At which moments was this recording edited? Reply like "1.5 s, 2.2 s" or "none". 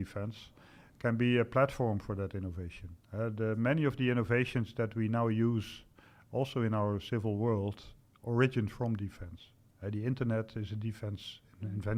3.0 s